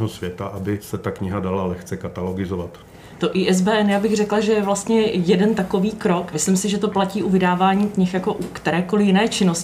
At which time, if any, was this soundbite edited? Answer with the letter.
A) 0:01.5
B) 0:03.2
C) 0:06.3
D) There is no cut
D